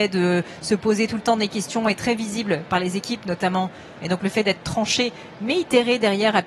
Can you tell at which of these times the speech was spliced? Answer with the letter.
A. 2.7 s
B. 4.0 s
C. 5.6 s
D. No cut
B